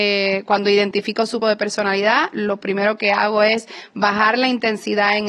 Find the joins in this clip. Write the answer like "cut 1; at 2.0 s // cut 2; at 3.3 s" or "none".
cut 1; at 1.4 s

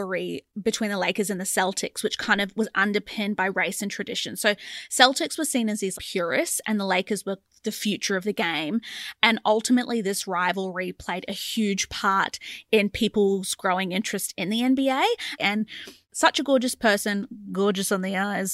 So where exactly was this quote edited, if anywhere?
cut 1; at 5.9 s // cut 2; at 15.4 s

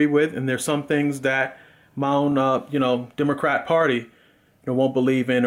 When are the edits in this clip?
none

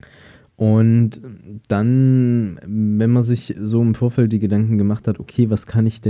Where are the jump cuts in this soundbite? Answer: none

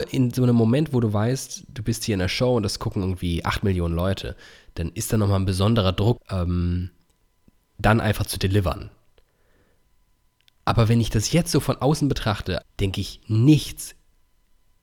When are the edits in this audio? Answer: cut 1; at 6.2 s // cut 2; at 12.6 s

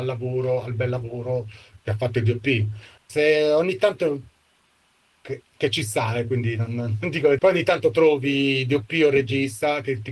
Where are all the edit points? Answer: cut 1; at 3.0 s // cut 2; at 7.4 s

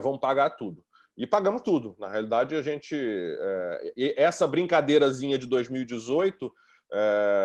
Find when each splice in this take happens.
cut 1; at 4.0 s

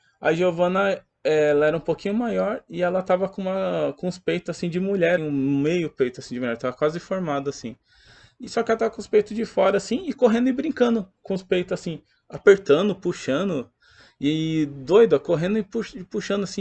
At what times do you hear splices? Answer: cut 1; at 5.2 s

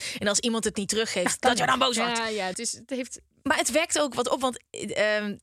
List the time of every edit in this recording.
cut 1; at 2.5 s

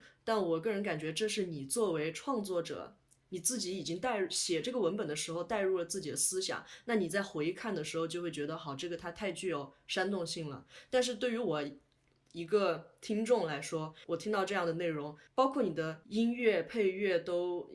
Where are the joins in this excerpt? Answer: none

